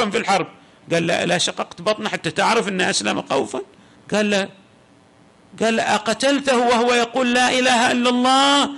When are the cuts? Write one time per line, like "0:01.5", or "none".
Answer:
none